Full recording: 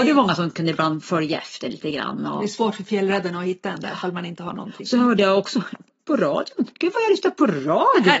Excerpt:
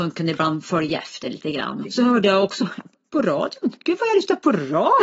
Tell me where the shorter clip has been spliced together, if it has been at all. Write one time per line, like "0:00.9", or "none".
0:01.8